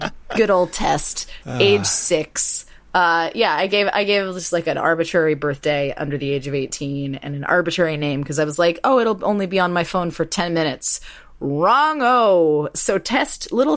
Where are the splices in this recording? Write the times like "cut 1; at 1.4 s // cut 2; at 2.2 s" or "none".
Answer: none